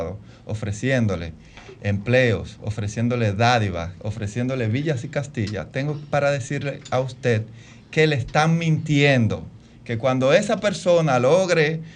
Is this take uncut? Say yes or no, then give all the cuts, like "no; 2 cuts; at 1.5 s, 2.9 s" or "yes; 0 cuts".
yes; 0 cuts